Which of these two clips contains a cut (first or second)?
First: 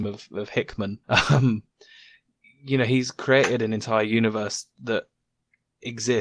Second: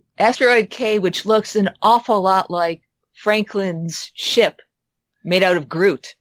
first